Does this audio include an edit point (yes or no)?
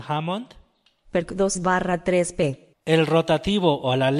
yes